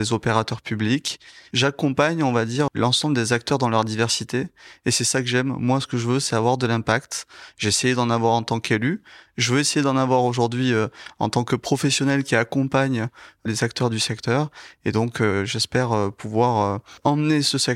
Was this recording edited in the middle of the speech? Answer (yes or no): yes